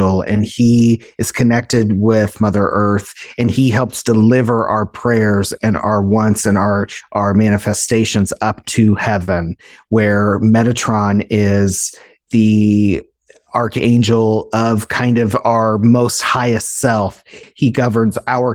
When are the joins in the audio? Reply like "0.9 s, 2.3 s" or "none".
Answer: 17.4 s